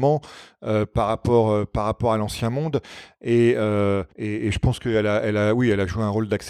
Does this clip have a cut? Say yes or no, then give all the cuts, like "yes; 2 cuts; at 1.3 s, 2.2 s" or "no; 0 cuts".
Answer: yes; 1 cut; at 4.1 s